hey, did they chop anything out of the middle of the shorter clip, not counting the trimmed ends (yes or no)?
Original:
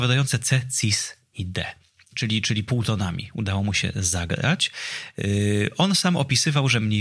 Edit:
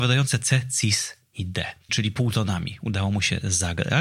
yes